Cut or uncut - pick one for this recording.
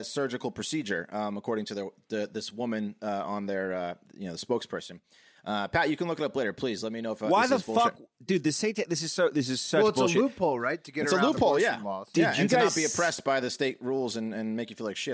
uncut